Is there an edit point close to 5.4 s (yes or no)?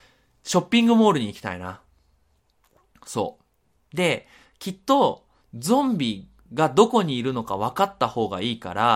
yes